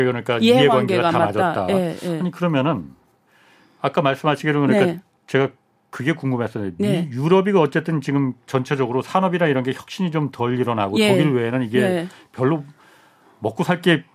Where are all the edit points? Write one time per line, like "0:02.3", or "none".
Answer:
none